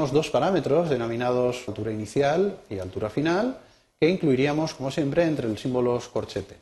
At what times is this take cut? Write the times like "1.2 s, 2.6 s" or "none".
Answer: 1.7 s

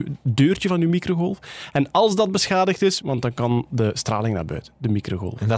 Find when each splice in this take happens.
3.0 s

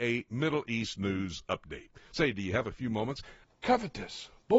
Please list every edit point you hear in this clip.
3.4 s

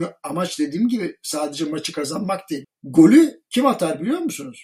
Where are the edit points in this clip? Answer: 2.6 s

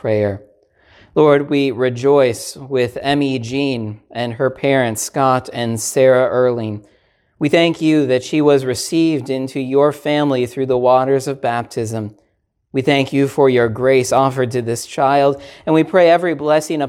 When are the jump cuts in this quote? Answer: none

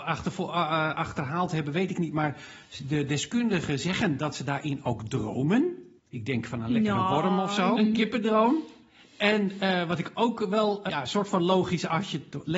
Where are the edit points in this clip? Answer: 6.0 s, 7.8 s, 10.9 s

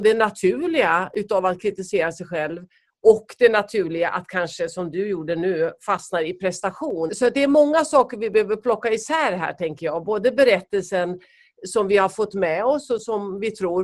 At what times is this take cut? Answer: 7.1 s

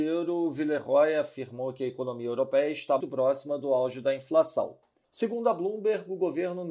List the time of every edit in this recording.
3.0 s, 5.0 s

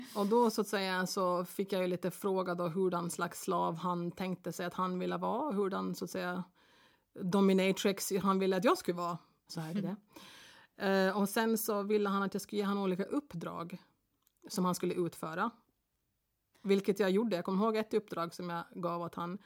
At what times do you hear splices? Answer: 9.5 s

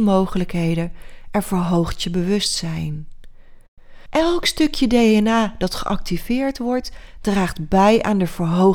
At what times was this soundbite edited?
4.1 s

